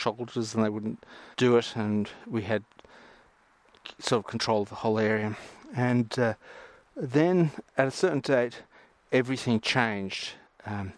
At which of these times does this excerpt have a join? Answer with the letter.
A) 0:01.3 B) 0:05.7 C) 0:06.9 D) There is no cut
A